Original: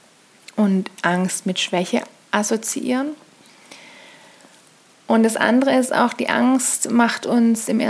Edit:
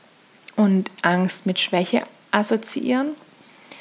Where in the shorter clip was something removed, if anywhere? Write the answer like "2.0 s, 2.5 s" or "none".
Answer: none